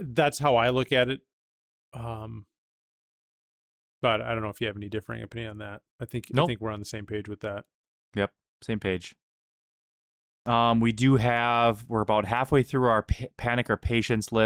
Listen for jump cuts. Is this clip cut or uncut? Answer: uncut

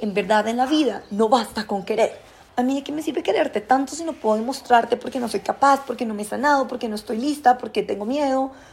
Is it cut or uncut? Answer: cut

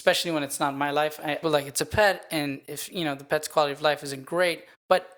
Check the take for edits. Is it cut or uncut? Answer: cut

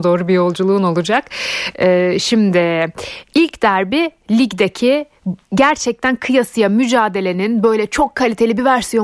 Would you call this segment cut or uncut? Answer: cut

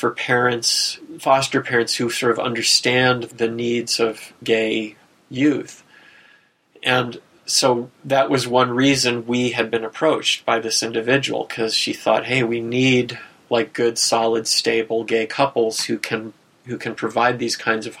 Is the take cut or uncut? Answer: uncut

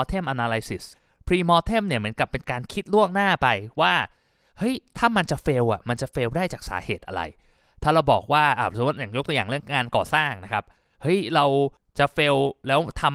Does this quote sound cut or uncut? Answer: uncut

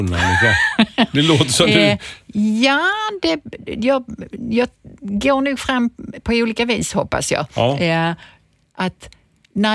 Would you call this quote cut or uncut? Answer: uncut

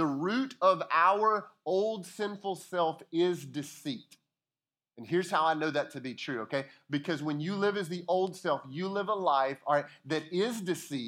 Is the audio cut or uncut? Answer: uncut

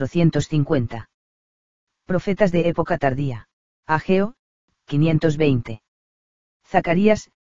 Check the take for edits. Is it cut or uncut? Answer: cut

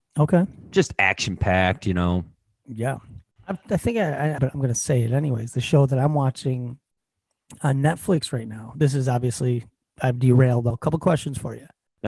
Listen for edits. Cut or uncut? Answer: cut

